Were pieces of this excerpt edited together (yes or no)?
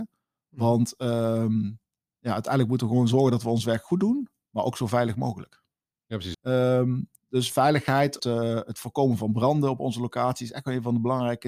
yes